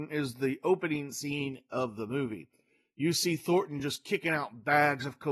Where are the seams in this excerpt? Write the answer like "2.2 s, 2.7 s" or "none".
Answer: none

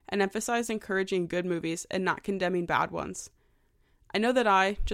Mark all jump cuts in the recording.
none

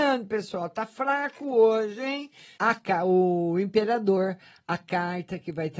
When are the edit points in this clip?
2.6 s

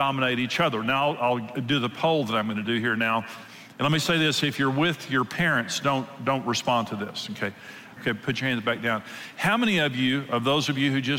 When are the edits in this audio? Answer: 8.0 s

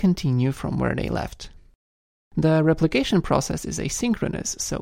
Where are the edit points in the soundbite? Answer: none

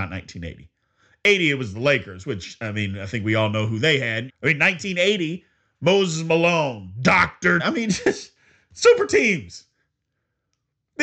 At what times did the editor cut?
4.3 s, 7.6 s

